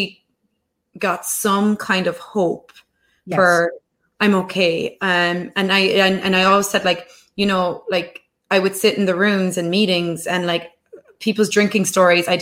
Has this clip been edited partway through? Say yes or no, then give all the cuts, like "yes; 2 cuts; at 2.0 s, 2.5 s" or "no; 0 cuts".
no; 0 cuts